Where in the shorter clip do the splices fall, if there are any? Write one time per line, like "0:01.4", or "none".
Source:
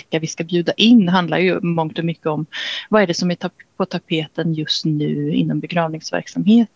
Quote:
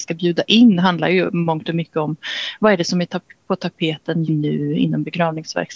0:04.3